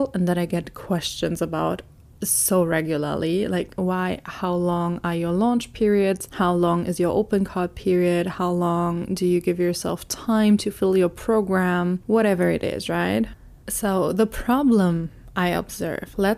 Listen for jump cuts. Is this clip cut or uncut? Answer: uncut